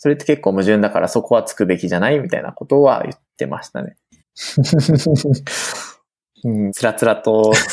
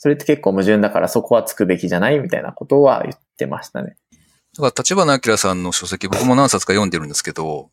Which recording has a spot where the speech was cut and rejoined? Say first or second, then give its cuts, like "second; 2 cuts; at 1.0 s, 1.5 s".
first; 2 cuts; at 4.2 s, 6.7 s